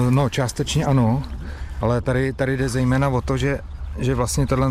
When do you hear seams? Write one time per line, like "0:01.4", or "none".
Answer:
none